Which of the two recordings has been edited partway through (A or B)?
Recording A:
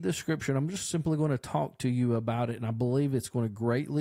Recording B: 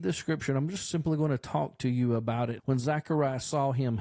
B